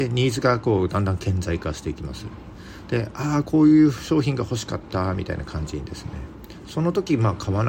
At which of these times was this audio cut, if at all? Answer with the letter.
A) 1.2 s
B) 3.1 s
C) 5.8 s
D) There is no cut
D